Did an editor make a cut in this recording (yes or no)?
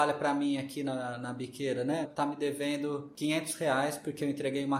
yes